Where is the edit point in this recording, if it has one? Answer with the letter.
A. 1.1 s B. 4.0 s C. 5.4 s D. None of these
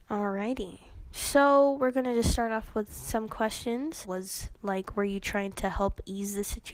B